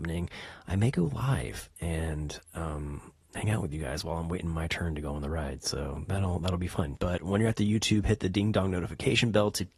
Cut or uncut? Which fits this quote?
cut